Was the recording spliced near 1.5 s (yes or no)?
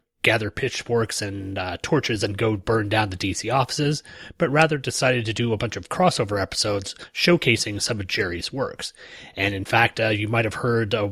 no